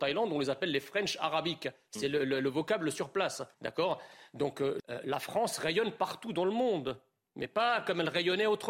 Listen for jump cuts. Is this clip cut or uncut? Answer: cut